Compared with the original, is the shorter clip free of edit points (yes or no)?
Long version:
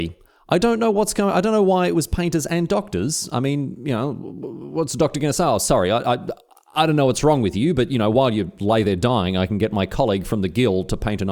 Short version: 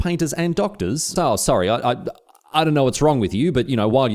no